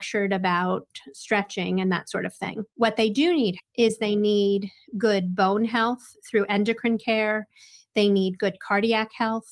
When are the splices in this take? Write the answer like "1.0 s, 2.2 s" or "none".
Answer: 3.6 s